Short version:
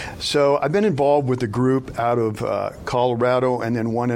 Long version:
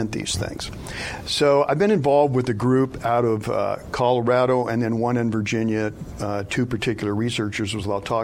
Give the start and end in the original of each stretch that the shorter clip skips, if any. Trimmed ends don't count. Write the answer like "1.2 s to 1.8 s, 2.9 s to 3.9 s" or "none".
none